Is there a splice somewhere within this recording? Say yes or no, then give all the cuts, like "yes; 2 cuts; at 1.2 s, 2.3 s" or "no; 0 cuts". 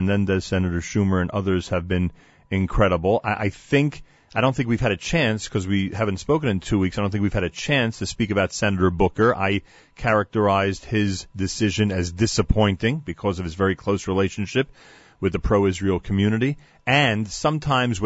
no; 0 cuts